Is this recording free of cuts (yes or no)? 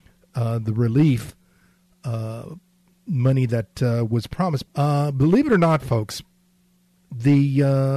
no